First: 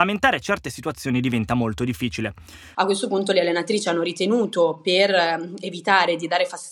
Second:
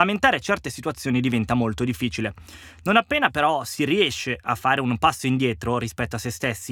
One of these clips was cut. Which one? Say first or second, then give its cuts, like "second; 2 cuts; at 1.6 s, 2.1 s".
first; 1 cut; at 2.7 s